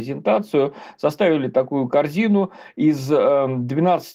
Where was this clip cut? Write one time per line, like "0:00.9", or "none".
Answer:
none